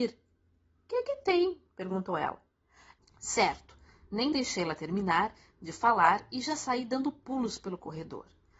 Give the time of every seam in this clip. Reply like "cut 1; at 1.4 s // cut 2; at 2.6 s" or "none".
cut 1; at 3.0 s